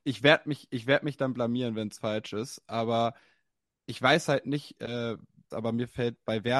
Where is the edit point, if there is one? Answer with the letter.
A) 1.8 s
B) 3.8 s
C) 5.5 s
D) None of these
C